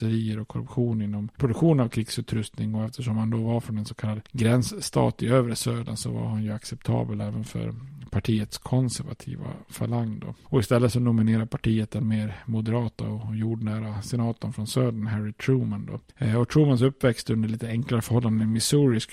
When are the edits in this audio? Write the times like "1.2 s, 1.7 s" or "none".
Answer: 10.4 s